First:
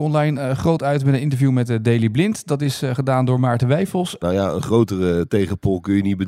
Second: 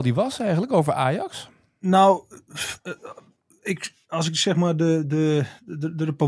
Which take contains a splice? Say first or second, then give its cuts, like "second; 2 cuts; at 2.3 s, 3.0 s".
first; 1 cut; at 4.2 s